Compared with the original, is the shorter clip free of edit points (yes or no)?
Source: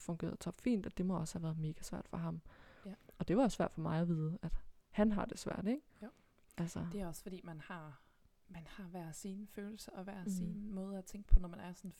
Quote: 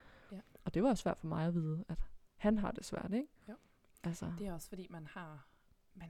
yes